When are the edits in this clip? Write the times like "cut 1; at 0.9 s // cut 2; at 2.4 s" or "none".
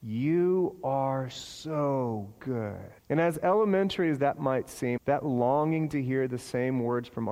cut 1; at 3.0 s // cut 2; at 5.0 s